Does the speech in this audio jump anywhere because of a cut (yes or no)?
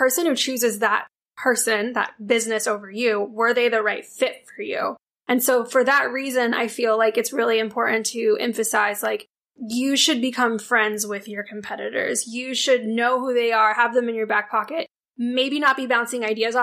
no